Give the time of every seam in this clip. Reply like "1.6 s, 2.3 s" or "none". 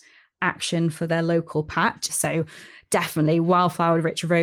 2.1 s

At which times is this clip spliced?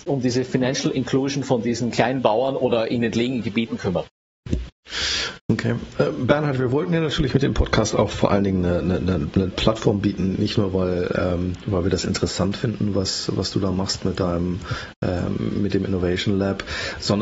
none

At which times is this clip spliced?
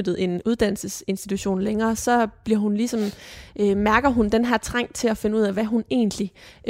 none

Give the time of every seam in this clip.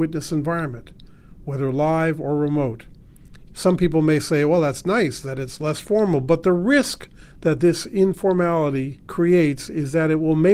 3.5 s

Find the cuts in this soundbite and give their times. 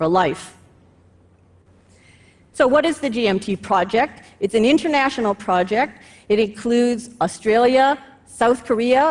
none

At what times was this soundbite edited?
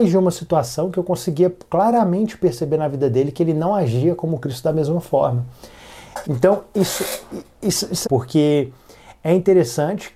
6.2 s, 8.0 s

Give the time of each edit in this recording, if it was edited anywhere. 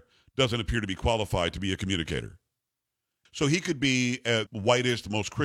3.3 s, 4.5 s

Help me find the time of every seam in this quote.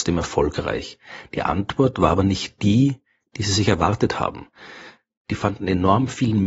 none

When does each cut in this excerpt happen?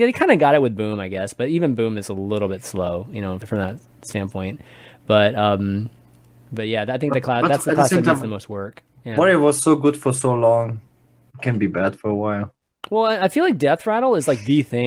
3.4 s

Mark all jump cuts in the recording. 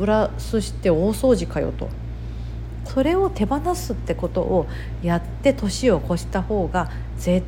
2.9 s

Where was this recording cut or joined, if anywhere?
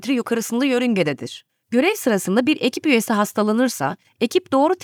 1.5 s

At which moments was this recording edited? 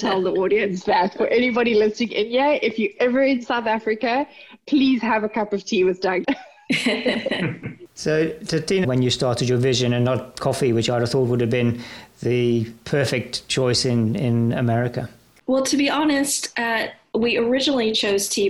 6.2 s, 8.8 s

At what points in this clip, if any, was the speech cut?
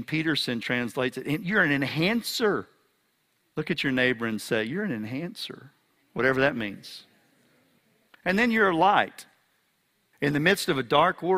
none

